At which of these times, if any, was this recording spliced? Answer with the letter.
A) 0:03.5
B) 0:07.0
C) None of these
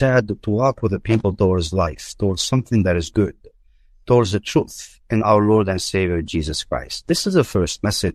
C